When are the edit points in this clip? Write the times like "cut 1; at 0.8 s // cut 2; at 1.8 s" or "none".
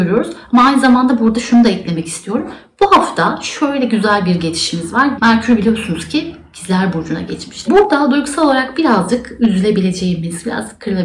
cut 1; at 5.2 s // cut 2; at 7.7 s